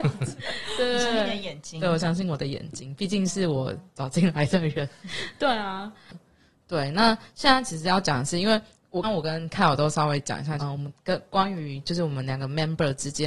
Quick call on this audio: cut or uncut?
cut